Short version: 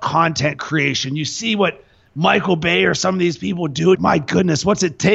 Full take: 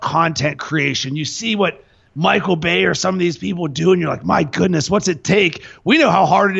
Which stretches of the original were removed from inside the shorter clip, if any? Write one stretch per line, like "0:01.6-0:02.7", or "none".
0:03.9-0:04.2